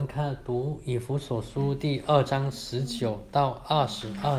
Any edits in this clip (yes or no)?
no